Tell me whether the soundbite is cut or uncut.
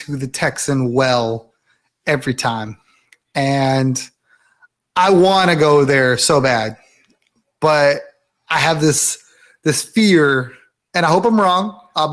uncut